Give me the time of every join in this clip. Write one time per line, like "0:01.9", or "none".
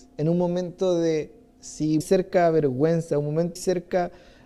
0:02.0
0:03.6

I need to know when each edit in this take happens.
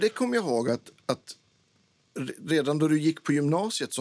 none

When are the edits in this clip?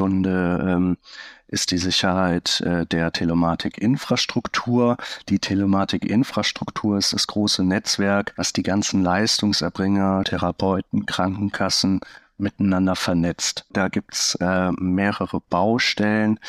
0:10.2
0:13.7

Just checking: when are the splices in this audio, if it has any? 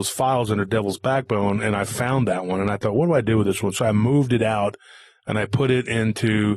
none

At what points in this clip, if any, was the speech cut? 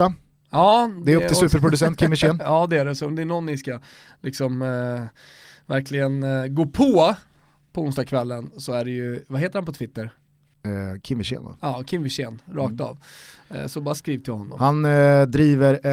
none

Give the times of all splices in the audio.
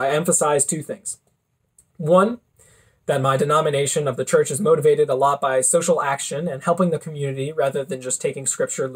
none

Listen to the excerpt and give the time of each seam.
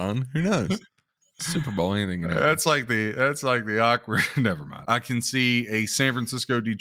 0:04.8

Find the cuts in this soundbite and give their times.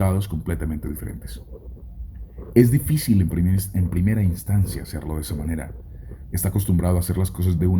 0:06.3

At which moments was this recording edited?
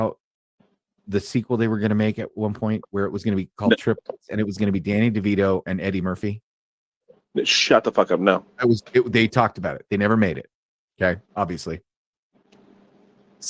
0:05.7

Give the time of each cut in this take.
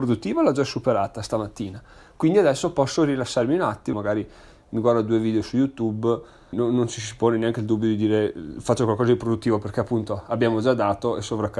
0:03.9
0:06.5

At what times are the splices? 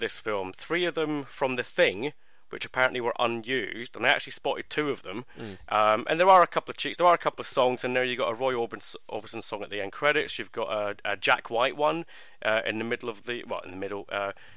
0:05.7

